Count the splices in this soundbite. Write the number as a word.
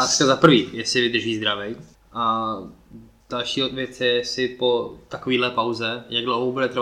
one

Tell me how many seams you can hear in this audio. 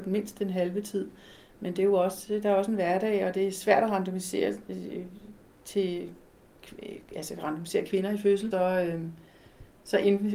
one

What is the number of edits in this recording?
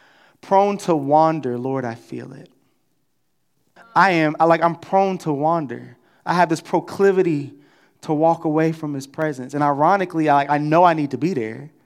one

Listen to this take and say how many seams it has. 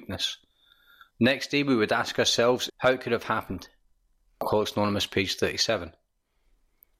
two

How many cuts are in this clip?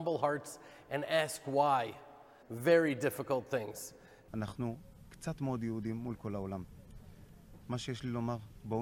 two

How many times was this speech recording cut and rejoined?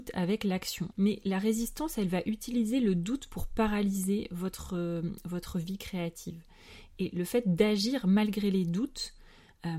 one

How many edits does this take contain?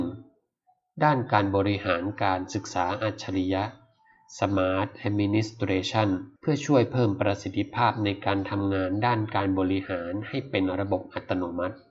one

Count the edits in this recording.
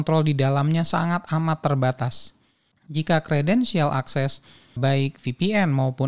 two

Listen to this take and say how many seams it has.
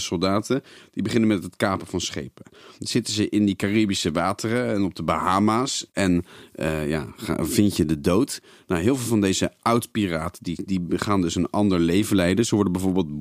two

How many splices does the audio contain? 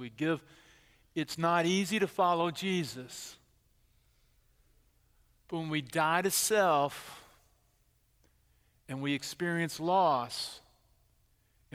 zero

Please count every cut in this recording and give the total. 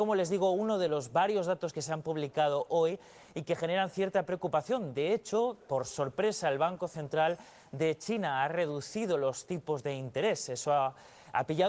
zero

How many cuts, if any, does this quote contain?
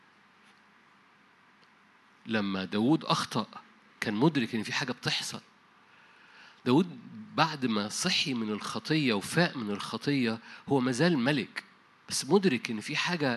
zero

